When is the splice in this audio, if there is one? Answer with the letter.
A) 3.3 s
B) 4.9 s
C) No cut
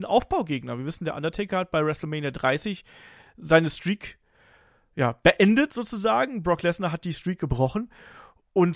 C